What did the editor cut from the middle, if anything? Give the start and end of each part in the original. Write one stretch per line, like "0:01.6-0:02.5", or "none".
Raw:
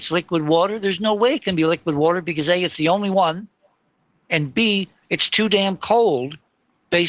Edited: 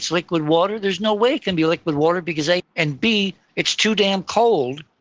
0:02.6-0:04.1